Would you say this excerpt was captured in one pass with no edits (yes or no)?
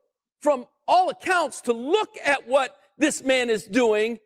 yes